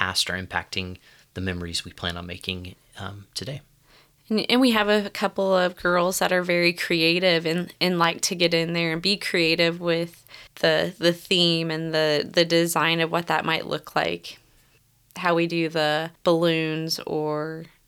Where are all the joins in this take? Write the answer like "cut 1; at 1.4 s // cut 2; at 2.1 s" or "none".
cut 1; at 10.5 s